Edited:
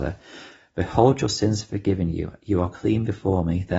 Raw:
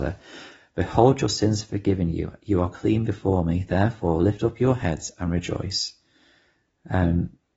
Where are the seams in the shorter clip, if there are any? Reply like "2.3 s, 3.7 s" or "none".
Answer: none